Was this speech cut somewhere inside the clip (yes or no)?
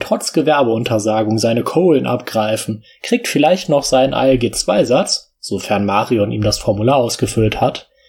no